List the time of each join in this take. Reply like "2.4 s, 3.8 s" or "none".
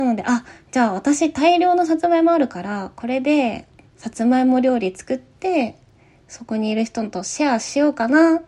3.8 s